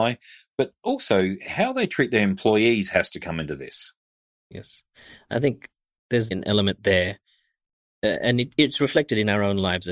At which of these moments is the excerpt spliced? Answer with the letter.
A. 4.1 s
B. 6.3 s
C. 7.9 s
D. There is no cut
B